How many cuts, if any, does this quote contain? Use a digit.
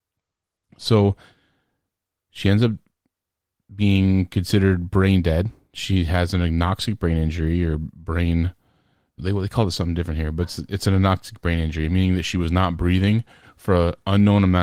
1